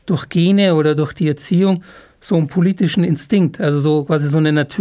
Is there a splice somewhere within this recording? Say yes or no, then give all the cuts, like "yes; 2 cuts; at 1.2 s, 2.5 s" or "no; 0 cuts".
no; 0 cuts